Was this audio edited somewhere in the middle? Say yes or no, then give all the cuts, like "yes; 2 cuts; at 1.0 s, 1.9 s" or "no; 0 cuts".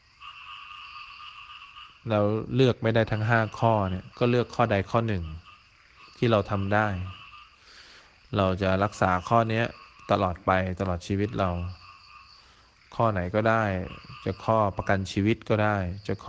yes; 1 cut; at 4.1 s